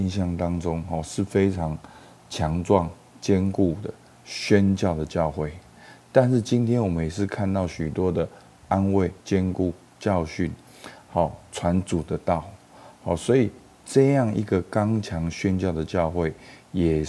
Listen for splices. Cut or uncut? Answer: cut